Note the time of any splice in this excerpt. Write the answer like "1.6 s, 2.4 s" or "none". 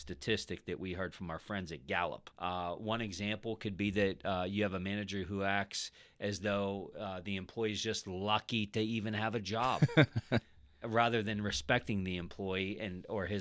2.3 s